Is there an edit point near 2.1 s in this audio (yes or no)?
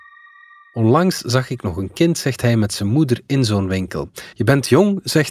no